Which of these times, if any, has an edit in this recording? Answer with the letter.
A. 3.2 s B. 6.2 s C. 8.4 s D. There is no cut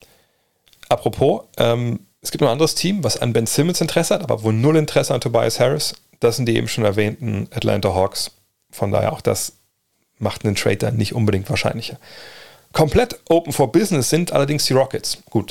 A